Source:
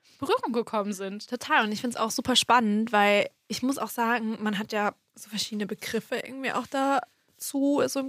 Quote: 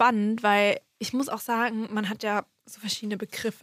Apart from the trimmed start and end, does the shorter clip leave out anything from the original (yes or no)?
no